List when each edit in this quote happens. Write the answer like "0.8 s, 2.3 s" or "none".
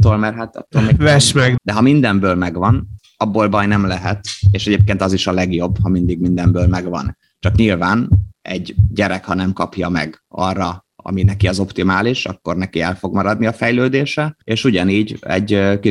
1.6 s, 14.4 s